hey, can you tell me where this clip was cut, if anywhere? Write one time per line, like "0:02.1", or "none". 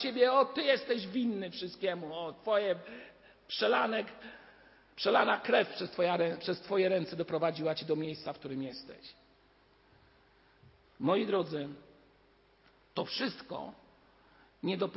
none